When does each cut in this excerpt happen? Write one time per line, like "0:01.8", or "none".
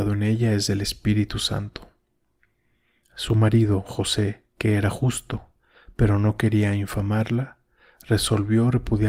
0:03.0
0:04.5